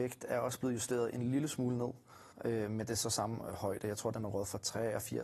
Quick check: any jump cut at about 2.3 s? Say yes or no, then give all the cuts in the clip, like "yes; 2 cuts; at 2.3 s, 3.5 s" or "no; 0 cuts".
yes; 1 cut; at 2.3 s